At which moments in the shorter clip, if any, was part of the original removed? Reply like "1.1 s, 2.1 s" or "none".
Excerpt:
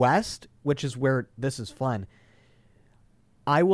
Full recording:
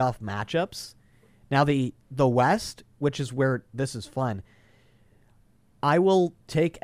none

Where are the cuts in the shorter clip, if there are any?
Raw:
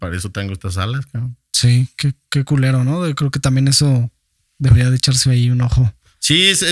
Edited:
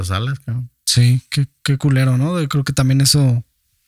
none

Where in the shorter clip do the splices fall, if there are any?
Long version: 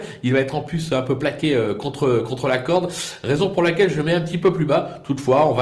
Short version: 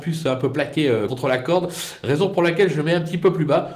1.1 s

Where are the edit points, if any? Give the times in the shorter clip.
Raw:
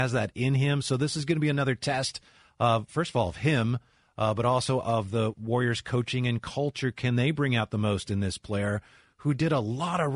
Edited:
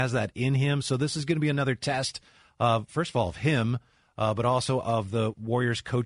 none

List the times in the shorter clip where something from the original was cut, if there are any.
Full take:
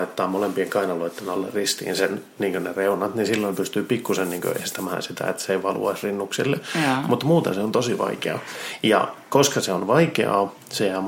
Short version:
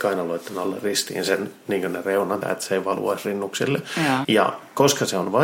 2.4 s, 4.2 s

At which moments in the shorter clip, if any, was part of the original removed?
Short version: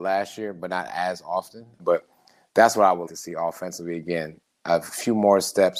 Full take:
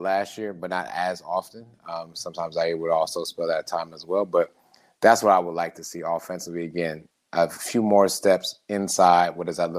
1.8 s, 3.1 s

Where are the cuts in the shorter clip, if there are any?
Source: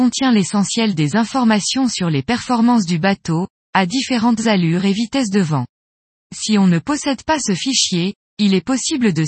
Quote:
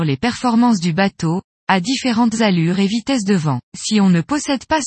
3.7 s

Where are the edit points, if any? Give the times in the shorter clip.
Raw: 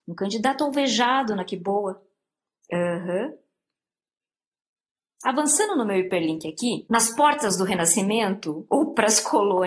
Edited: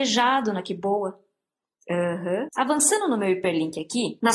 2.5 s

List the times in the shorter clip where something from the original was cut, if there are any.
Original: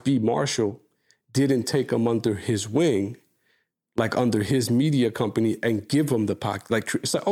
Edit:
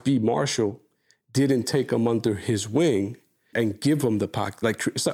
3.5 s

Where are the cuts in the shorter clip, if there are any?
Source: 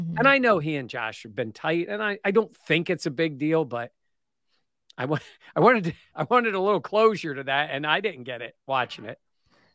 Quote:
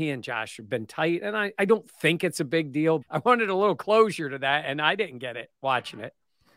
3.0 s

